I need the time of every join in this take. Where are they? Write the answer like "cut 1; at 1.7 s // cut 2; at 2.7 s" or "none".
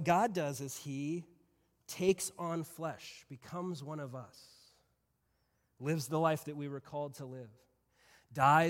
none